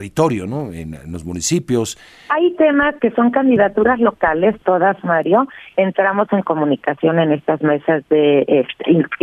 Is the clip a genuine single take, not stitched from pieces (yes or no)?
no